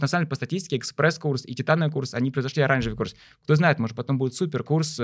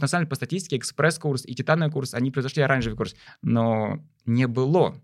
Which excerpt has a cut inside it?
second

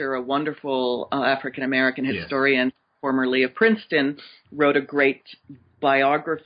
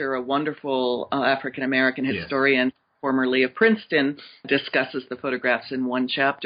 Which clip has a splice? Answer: second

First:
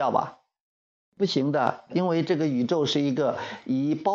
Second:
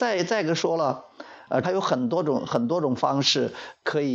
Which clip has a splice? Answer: second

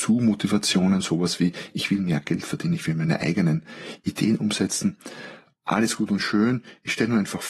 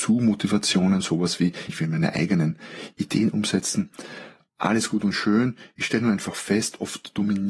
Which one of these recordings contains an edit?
second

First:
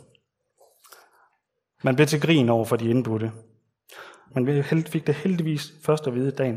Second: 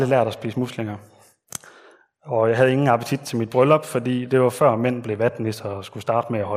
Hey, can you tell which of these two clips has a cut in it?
first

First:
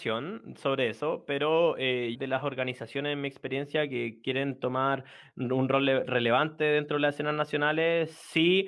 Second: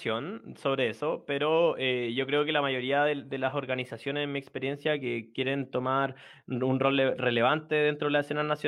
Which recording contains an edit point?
first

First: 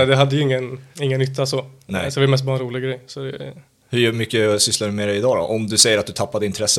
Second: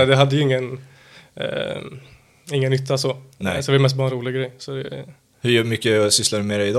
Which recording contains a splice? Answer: first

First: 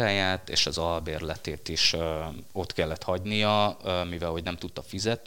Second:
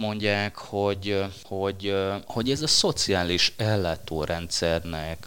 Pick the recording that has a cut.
second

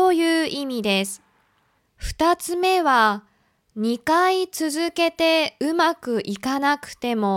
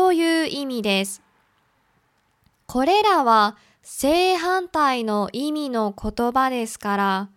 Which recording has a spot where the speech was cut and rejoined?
first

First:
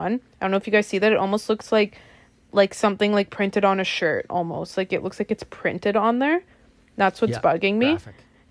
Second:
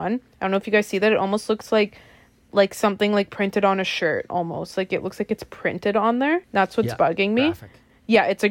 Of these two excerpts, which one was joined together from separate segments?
second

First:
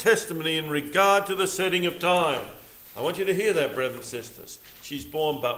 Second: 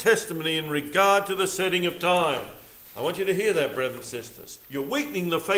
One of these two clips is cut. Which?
second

